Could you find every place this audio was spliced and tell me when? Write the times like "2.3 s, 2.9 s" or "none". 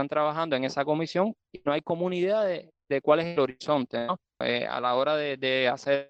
4.4 s